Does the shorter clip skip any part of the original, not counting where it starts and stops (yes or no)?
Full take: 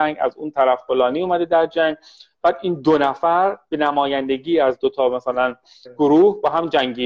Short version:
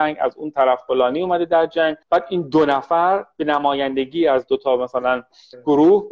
yes